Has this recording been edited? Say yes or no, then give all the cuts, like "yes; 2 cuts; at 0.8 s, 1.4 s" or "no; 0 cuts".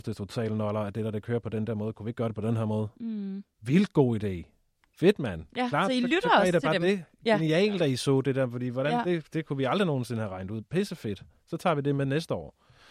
no; 0 cuts